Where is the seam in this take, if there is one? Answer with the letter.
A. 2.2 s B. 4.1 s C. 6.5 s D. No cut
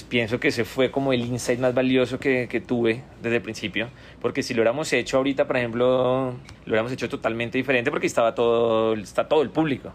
C